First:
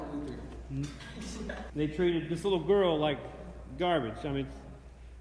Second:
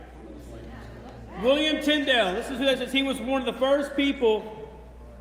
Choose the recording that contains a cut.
first; 1 cut; at 1.7 s

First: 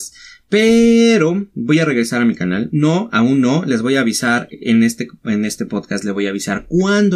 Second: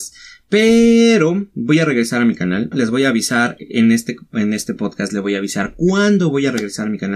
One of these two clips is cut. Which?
second; 1 cut; at 2.7 s

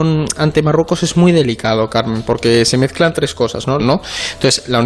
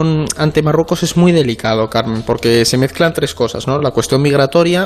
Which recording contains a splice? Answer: first; 1 cut; at 3.8 s

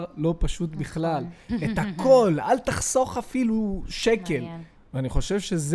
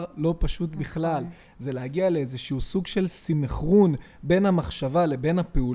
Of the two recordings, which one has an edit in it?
first; 2 cuts; at 1.5 s, 4.8 s

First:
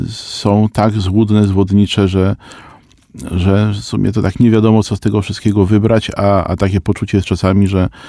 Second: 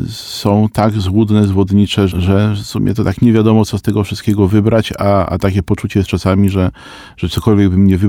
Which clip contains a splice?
second; 1 cut; at 2.1 s

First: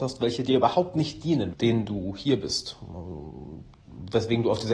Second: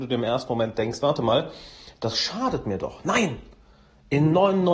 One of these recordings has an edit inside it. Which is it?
first; 1 cut; at 1.5 s

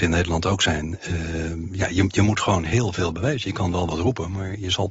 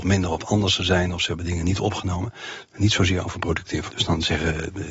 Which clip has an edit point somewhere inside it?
second; 2 cuts; at 2.6 s, 3.9 s

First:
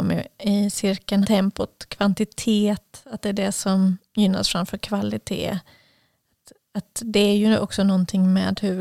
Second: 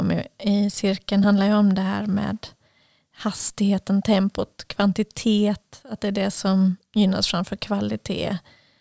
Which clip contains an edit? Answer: first; 1 cut; at 1.2 s

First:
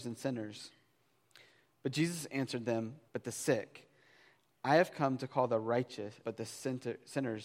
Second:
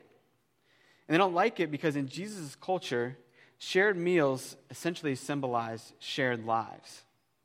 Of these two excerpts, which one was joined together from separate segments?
first; 2 cuts; at 3.1 s, 6.2 s

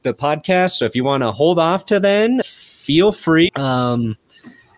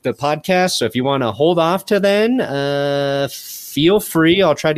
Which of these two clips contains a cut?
first; 2 cuts; at 2.4 s, 3.5 s

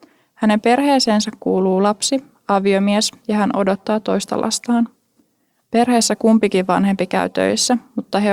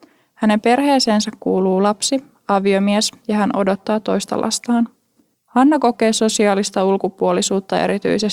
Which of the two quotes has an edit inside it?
second; 1 cut; at 5.3 s

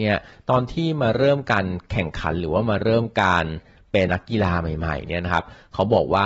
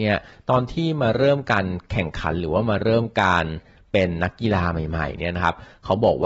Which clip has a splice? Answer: first; 1 cut; at 4.1 s

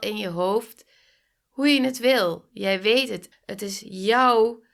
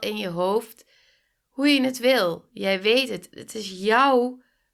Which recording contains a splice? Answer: first; 1 cut; at 3.3 s

